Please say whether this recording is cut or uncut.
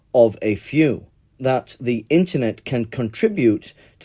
cut